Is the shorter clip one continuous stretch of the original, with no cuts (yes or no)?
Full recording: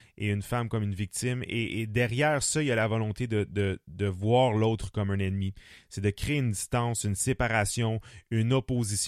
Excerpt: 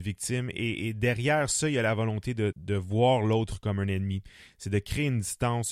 no